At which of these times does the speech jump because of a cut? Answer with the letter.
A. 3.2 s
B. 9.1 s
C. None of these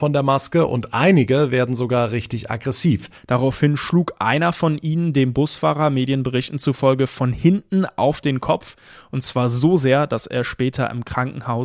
A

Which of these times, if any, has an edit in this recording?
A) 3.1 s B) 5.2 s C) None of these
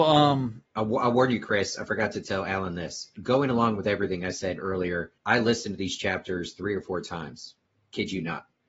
B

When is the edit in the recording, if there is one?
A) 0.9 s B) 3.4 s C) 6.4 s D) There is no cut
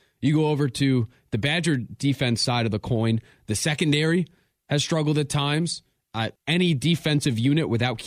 C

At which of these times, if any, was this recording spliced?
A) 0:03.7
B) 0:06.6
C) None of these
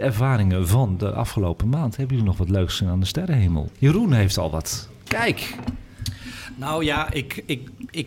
A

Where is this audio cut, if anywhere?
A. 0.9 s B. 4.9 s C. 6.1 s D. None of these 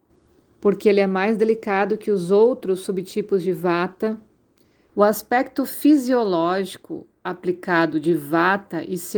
B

